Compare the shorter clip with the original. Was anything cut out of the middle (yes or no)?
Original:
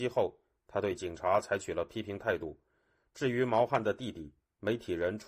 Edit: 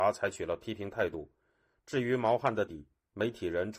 yes